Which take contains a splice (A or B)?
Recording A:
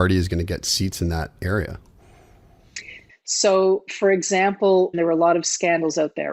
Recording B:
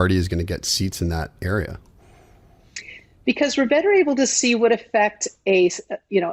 A